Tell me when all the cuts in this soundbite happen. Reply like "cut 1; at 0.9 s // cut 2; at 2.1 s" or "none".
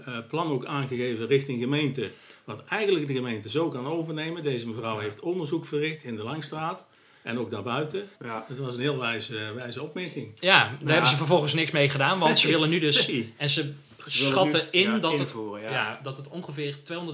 cut 1; at 8.2 s